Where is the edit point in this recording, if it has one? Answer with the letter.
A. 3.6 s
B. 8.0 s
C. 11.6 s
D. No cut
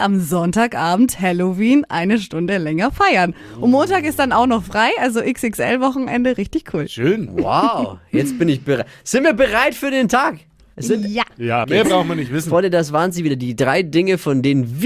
C